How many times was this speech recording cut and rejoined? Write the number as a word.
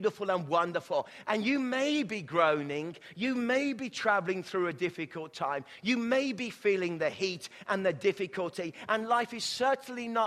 one